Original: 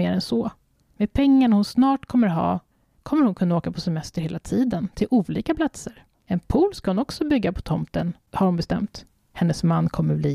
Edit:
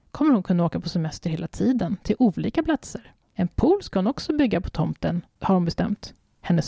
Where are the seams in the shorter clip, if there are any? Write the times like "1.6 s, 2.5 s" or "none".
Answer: none